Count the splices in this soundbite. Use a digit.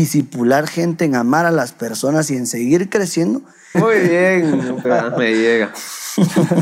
2